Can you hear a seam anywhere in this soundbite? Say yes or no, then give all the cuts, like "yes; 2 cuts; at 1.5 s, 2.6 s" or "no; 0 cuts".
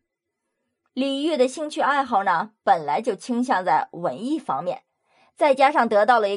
no; 0 cuts